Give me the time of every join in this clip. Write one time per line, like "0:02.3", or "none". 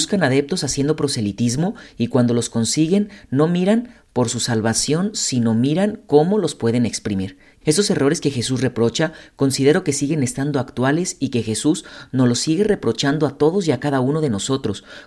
0:07.6